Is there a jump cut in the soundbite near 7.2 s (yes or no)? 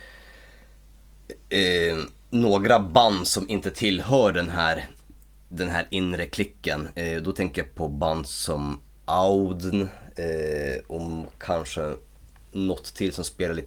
no